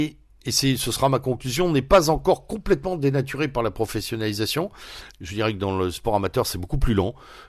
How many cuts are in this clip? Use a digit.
1